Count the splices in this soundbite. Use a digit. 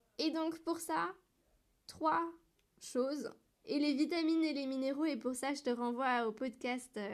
1